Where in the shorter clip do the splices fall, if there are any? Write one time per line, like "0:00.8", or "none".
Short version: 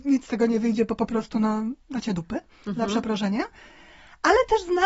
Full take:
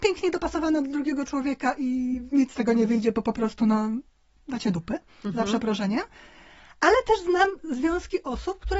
0:01.8